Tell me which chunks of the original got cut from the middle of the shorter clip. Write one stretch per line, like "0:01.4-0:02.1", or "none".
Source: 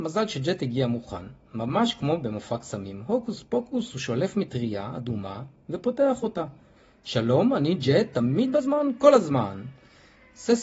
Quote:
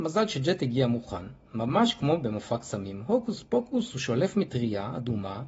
none